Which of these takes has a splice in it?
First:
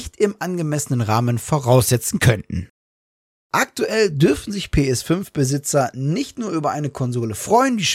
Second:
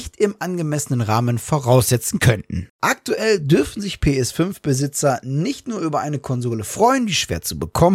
second; 1 cut; at 2.7 s

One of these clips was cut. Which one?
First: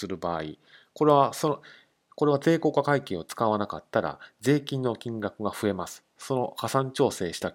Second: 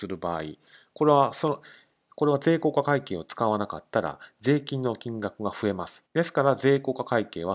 second; 1 cut; at 6.1 s

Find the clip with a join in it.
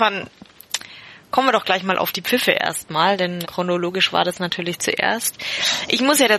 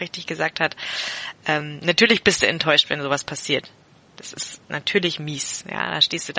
first; 1 cut; at 3.4 s

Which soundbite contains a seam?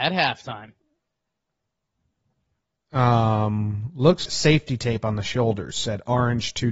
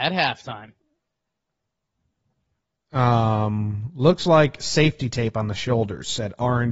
first; 1 cut; at 4.3 s

